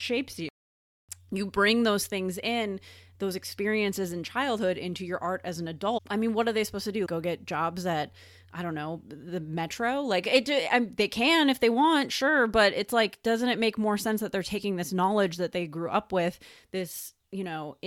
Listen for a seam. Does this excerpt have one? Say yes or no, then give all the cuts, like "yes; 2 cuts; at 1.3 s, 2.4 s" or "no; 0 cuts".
yes; 1 cut; at 7.1 s